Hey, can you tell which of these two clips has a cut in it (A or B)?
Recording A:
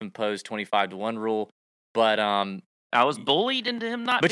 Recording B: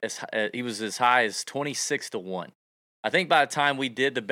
A